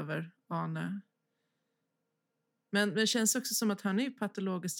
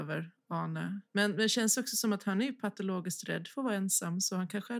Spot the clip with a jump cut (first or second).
second